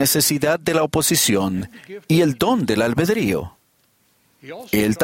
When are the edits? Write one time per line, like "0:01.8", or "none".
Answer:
none

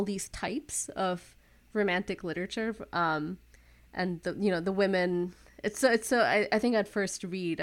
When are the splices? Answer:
none

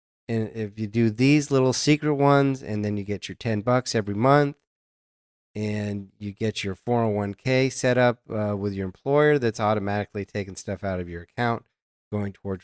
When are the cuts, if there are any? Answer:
none

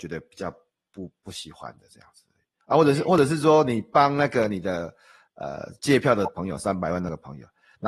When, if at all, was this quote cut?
none

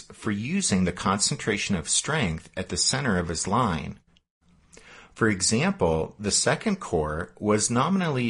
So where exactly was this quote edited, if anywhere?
none

